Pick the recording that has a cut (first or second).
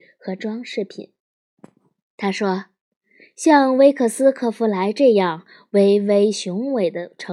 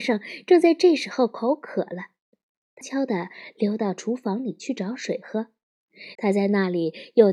second